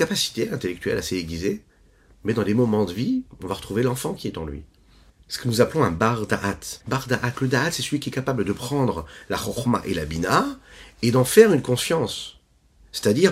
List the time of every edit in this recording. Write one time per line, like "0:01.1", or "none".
0:05.1
0:06.8